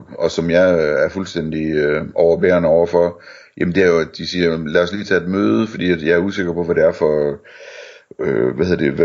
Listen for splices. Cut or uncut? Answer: uncut